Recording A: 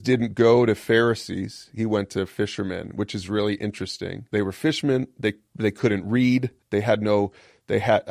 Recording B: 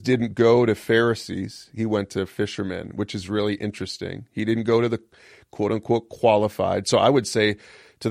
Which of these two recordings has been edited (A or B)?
A